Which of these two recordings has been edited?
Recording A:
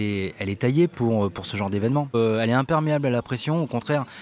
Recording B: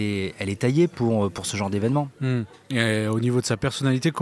A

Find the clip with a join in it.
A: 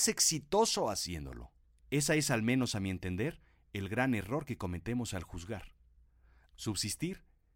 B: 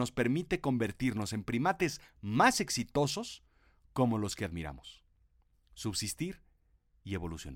A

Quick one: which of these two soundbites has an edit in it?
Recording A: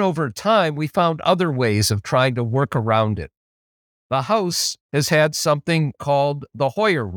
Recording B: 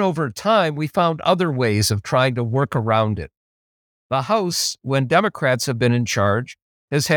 A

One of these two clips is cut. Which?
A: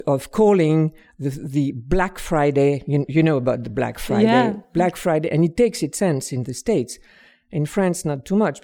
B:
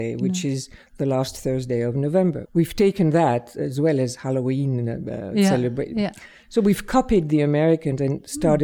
B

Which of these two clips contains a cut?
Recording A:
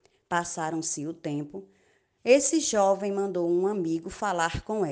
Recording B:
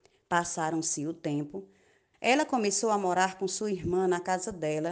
B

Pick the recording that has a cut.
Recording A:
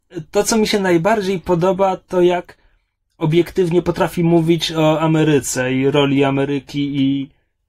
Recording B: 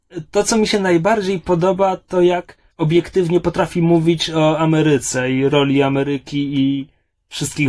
B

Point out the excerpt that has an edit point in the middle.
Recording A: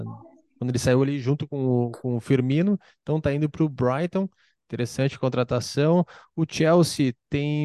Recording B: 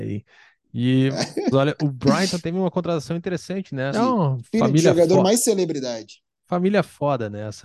B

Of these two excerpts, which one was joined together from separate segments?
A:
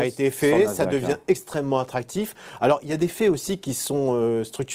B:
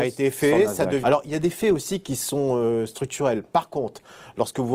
B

